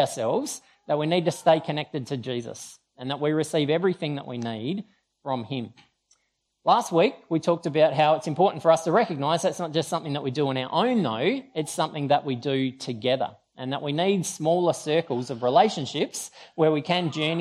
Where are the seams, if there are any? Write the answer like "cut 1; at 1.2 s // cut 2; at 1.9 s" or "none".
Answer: none